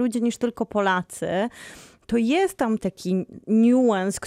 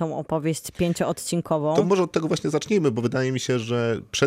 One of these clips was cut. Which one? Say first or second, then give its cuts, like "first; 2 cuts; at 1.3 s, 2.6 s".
first; 1 cut; at 2.8 s